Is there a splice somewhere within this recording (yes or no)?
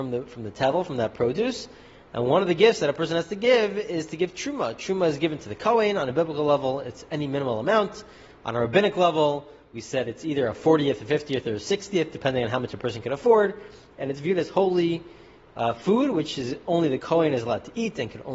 no